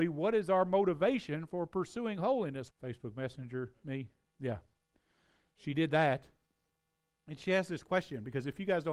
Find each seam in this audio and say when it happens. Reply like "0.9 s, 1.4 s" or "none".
2.7 s